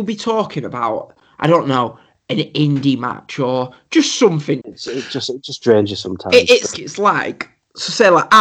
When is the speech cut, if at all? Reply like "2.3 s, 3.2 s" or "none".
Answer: 4.6 s, 6.7 s